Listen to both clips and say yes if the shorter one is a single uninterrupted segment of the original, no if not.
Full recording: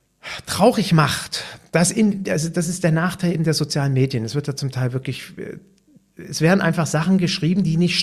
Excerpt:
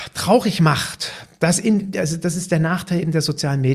yes